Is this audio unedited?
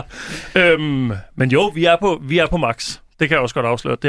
yes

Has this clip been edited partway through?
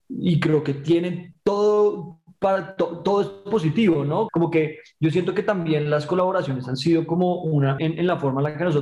yes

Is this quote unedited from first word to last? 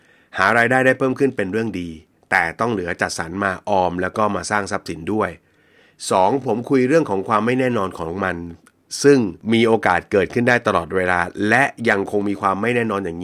yes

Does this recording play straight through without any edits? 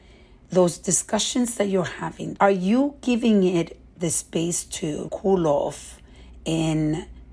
no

